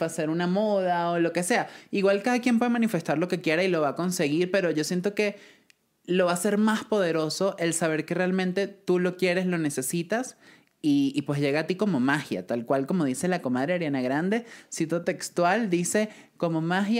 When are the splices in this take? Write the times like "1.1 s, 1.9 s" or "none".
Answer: none